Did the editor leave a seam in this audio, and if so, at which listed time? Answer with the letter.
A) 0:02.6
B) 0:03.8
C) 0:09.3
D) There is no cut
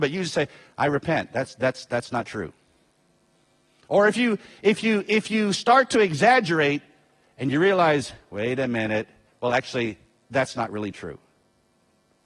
C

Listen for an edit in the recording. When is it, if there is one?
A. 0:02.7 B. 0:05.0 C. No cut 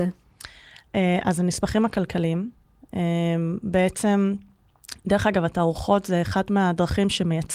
C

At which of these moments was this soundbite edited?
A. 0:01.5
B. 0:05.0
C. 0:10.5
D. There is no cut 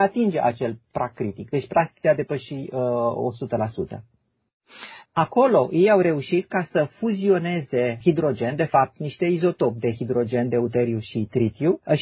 B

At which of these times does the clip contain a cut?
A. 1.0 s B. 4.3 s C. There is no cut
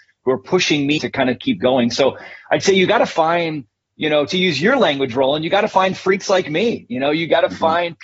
A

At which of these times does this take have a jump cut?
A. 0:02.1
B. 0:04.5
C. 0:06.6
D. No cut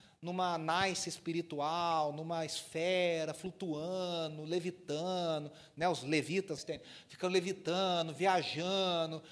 C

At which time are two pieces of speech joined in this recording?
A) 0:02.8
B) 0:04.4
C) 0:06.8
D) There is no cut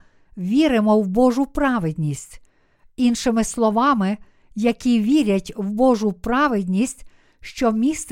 B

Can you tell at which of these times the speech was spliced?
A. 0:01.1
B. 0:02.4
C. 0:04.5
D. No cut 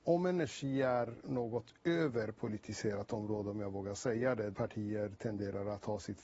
C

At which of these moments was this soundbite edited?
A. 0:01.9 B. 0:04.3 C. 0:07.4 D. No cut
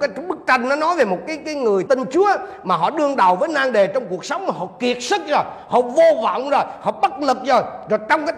A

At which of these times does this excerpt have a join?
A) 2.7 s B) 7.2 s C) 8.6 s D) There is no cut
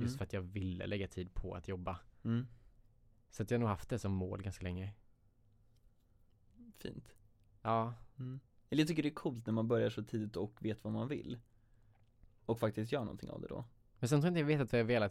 D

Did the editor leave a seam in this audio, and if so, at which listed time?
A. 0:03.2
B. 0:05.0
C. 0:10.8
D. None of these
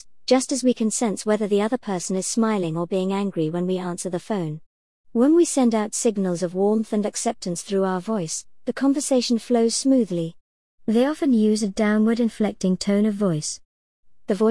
C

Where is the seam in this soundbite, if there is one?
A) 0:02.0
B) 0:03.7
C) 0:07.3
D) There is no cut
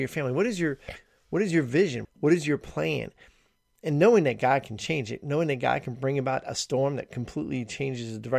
A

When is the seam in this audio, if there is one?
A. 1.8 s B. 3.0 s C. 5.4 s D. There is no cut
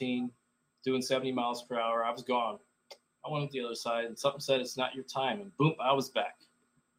D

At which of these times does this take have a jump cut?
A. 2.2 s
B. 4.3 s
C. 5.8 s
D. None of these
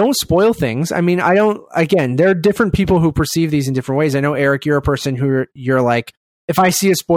D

